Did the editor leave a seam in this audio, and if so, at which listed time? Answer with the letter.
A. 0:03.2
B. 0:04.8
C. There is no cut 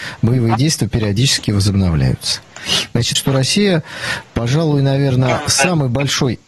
A